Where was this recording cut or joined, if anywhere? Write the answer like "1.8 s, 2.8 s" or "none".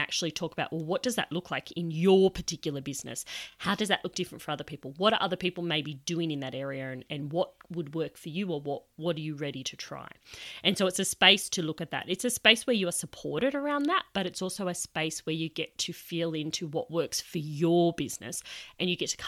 none